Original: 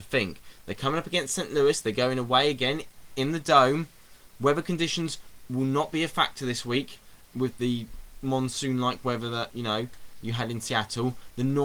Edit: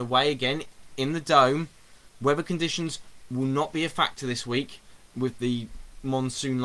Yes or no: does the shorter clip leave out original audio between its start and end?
no